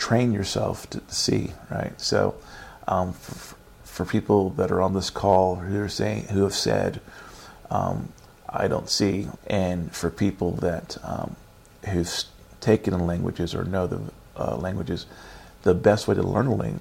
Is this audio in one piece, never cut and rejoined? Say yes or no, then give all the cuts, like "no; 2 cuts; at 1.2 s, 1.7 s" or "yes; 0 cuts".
no; 1 cut; at 9.4 s